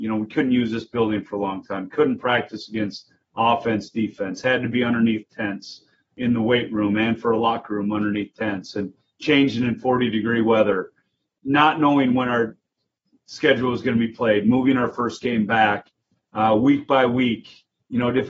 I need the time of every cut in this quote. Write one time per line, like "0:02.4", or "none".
none